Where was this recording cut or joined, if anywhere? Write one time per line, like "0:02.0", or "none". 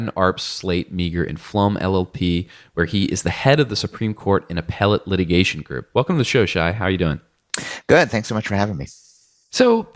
none